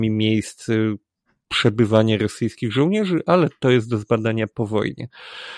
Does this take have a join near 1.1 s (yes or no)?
no